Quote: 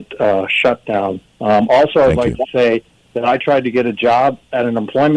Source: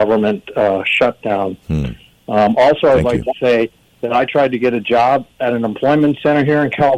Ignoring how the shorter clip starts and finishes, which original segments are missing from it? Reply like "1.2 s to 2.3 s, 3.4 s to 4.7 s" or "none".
1.6 s to 2.1 s

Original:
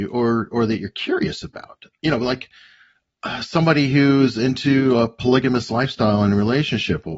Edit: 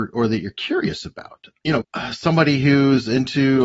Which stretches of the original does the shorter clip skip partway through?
2.2 s to 3.1 s

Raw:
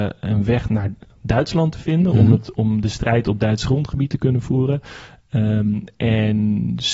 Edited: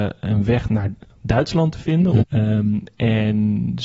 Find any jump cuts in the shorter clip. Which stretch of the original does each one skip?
2.2 s to 5.2 s

